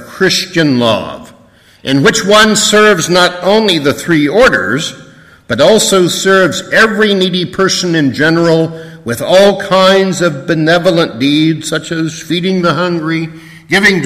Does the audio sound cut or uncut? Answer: uncut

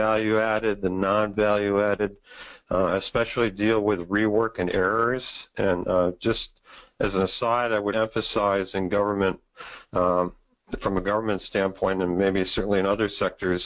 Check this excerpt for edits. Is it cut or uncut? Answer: cut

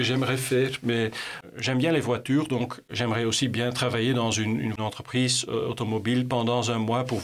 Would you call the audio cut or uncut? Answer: uncut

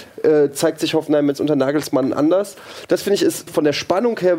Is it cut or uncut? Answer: cut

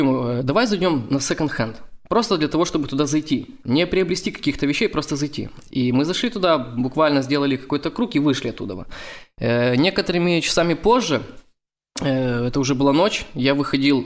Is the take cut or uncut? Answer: uncut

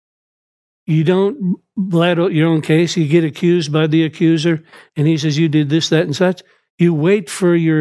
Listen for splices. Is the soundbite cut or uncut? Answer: uncut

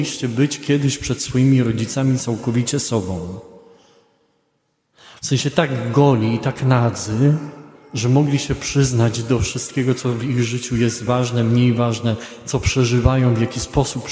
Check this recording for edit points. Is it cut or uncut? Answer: uncut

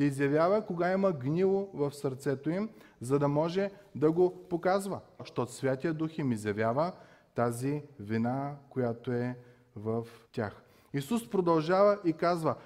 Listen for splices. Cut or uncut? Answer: cut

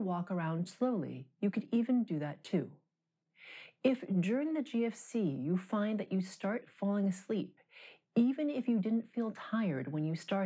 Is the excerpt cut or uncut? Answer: uncut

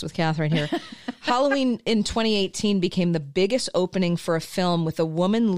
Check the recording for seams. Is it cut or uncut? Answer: uncut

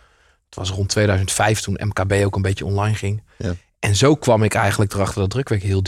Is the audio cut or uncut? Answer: uncut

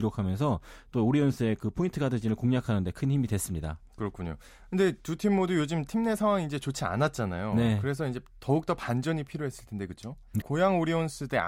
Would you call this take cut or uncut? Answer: cut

